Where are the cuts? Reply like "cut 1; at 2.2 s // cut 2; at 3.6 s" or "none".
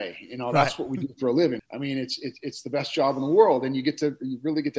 none